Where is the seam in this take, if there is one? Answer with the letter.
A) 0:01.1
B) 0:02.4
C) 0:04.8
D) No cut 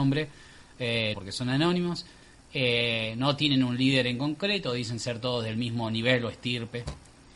A